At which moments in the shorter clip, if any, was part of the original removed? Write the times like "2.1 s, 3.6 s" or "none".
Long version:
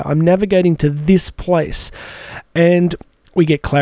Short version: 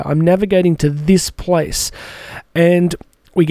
none